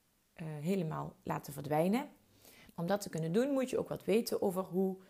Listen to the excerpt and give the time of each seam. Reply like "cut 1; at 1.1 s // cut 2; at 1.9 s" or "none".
cut 1; at 2.7 s